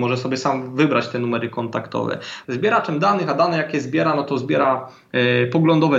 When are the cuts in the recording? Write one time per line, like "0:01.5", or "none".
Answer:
0:02.4